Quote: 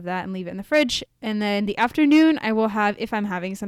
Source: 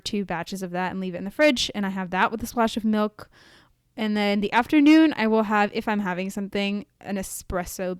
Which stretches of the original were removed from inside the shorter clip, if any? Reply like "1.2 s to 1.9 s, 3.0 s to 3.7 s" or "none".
1.7 s to 3.8 s